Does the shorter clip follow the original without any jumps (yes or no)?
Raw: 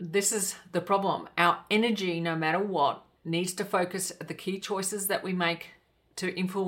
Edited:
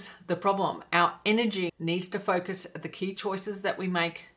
no